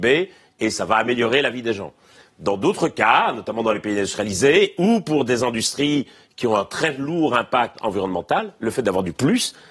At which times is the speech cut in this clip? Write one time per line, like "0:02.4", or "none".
none